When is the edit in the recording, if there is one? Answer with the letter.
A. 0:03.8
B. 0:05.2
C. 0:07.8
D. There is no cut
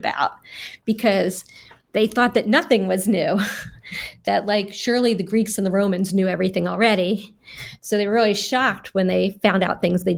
D